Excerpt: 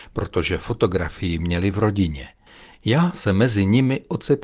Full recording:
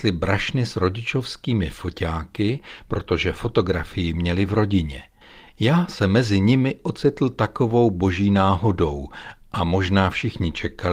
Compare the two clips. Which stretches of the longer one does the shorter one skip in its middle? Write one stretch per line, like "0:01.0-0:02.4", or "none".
none